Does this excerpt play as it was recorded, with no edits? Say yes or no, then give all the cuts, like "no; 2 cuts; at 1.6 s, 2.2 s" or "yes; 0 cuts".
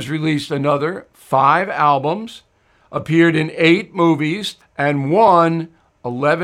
no; 1 cut; at 4.6 s